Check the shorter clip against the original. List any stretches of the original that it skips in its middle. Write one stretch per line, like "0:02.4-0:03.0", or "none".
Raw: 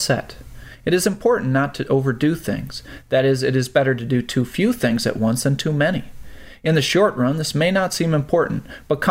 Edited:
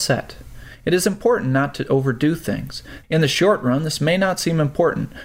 0:03.0-0:06.6